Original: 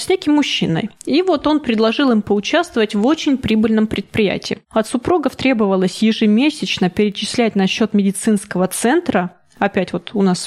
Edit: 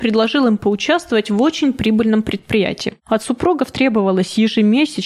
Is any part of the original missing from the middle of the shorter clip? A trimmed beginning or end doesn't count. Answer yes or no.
no